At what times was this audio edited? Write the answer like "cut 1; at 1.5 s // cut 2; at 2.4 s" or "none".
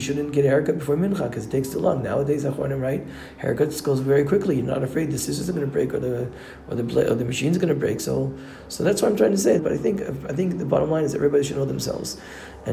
cut 1; at 9.6 s